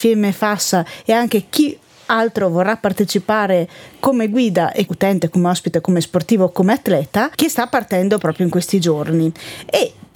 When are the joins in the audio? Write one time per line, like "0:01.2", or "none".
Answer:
none